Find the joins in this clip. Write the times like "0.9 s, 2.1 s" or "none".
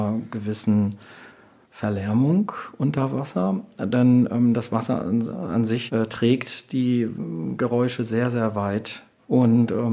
none